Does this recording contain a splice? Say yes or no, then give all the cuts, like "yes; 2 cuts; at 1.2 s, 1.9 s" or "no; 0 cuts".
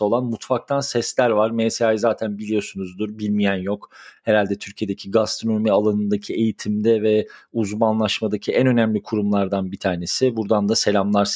no; 0 cuts